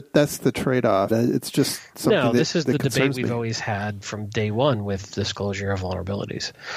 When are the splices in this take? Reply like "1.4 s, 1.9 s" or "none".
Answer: 1.1 s